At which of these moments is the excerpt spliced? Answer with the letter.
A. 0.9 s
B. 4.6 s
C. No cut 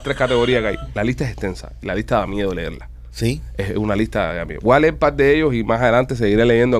A